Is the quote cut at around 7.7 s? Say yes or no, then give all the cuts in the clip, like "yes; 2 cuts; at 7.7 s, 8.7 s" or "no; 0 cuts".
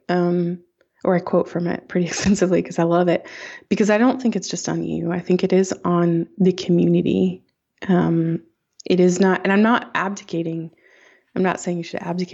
no; 0 cuts